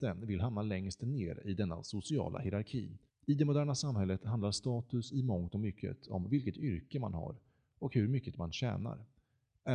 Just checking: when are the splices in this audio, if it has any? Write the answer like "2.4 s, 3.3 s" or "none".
3.1 s